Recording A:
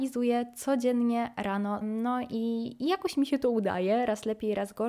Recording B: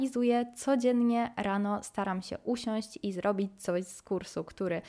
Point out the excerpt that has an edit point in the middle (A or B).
A